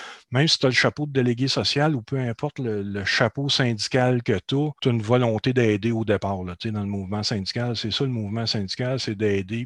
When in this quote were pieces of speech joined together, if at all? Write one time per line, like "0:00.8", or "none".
0:04.8